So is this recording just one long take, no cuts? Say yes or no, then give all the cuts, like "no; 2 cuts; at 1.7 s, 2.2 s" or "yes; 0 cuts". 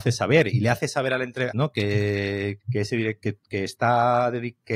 no; 2 cuts; at 1.5 s, 2.6 s